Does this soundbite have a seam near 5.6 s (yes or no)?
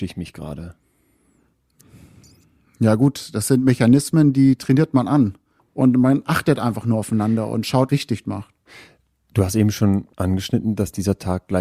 yes